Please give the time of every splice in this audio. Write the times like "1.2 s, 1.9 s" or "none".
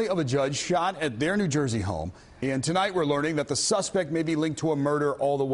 2.4 s